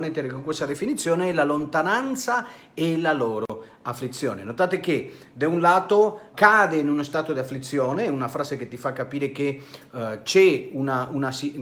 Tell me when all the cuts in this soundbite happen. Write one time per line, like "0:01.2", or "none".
0:06.3